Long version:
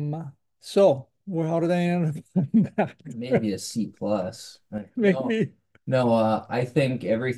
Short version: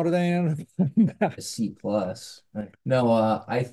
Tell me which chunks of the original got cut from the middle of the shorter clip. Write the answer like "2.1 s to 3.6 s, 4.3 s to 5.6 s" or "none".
2.9 s to 3.5 s, 4.9 s to 5.7 s